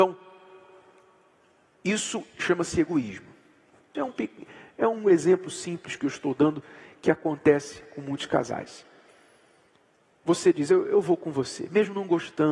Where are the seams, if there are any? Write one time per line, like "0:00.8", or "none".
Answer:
0:03.9